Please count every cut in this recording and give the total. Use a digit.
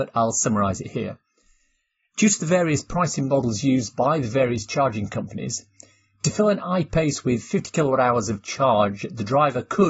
0